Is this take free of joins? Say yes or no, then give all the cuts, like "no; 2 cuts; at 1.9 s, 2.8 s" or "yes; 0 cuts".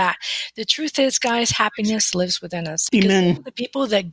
no; 1 cut; at 2.9 s